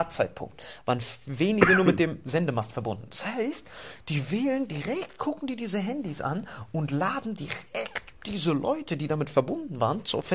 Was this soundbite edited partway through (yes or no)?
no